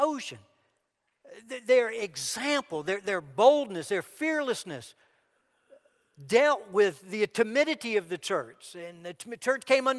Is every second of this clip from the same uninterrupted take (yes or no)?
yes